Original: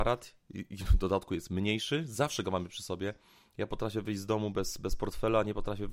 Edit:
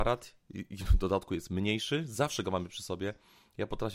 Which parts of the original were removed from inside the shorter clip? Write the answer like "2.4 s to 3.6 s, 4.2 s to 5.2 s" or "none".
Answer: none